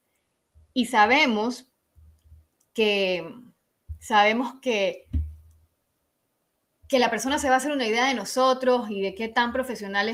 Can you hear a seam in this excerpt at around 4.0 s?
no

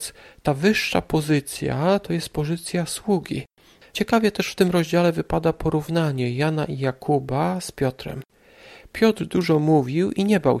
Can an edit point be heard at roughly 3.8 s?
yes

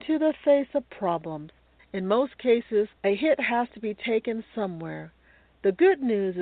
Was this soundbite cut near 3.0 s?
yes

